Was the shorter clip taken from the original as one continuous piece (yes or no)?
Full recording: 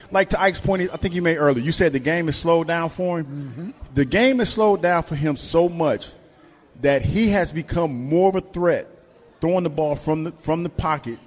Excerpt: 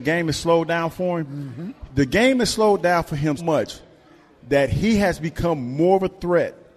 no